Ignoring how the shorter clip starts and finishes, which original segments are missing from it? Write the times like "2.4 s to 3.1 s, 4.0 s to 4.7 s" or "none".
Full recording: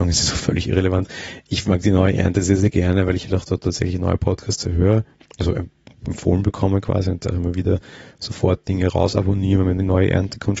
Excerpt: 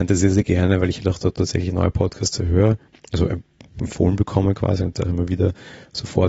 none